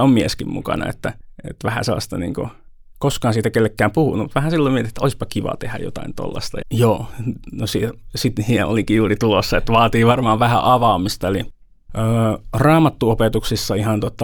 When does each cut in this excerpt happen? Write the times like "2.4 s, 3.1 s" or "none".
6.6 s